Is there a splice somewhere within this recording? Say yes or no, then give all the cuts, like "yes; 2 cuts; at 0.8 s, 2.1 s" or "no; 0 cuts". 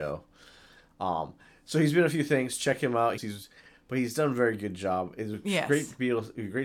yes; 1 cut; at 3.2 s